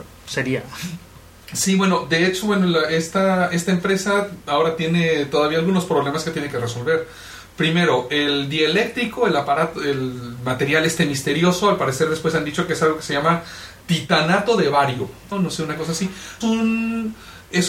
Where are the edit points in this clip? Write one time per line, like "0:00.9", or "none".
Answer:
0:13.8
0:15.3
0:16.4